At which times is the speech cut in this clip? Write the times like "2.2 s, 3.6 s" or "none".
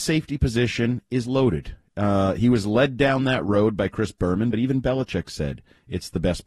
none